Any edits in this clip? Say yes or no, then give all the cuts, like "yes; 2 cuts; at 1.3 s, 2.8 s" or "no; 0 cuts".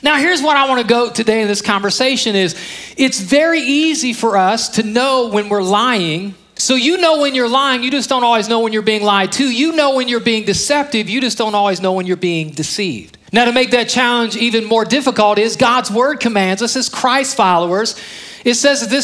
yes; 2 cuts; at 6.6 s, 13.3 s